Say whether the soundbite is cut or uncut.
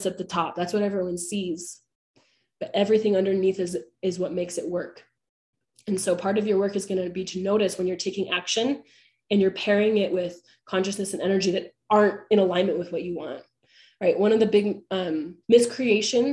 cut